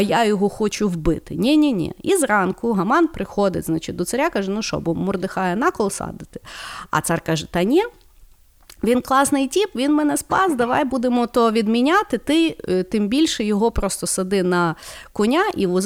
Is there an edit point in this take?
no; 0 cuts

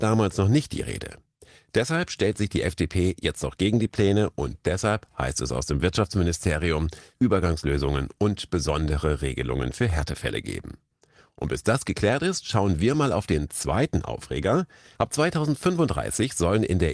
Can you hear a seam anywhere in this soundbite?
yes; 2 cuts; at 7.1 s, 15.0 s

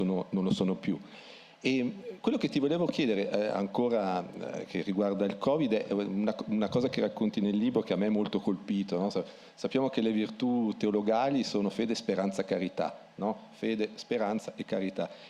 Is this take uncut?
yes; 0 cuts

